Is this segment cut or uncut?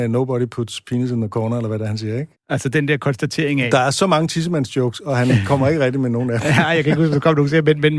cut